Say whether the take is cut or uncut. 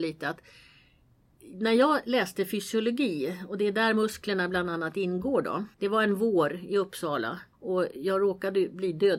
cut